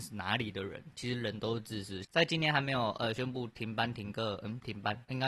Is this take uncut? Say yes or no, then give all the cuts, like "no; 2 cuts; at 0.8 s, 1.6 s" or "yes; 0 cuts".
no; 1 cut; at 2.0 s